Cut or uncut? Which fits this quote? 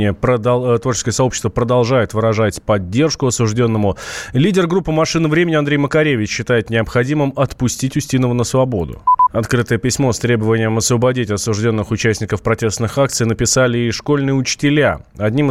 cut